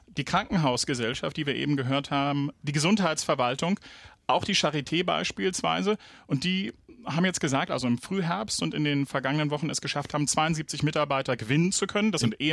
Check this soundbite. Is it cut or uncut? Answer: cut